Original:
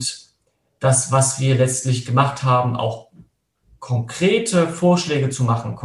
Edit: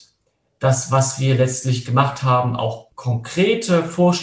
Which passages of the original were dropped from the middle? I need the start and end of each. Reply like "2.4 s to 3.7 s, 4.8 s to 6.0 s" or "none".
3.1 s to 3.8 s